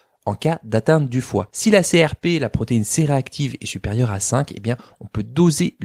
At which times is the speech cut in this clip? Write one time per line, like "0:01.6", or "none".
none